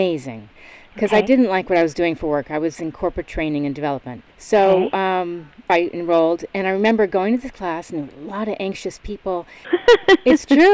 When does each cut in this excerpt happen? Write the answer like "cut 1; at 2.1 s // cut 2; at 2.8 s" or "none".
cut 1; at 4.3 s // cut 2; at 5.7 s // cut 3; at 9.6 s